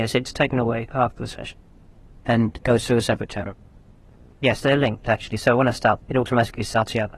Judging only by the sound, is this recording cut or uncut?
cut